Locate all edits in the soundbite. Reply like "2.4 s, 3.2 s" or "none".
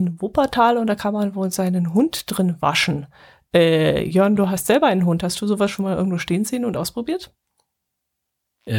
none